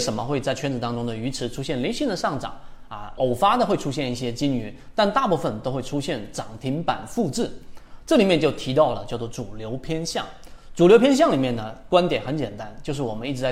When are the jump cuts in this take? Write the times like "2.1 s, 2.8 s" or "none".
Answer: 3.2 s